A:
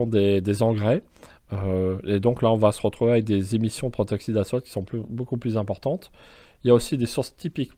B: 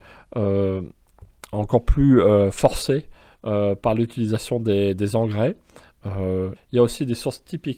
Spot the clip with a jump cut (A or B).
B